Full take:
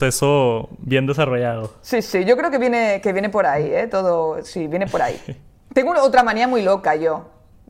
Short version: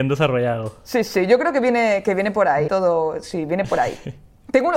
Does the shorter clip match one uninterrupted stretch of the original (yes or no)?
no